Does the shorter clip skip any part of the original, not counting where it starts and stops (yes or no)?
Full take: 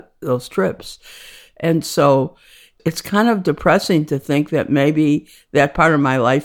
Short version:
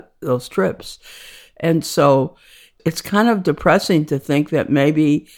no